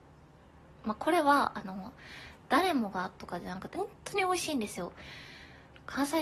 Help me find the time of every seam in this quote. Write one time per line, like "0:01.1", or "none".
0:03.7